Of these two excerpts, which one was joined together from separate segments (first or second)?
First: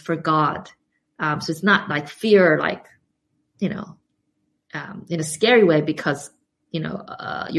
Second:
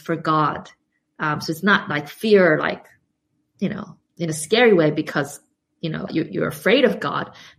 second